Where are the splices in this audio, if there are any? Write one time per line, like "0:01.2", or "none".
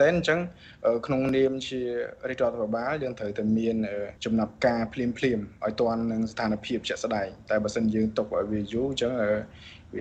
0:04.2